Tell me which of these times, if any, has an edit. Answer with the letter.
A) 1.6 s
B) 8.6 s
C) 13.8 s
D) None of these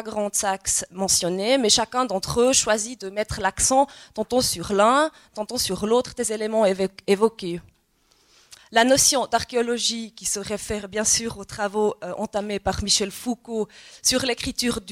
B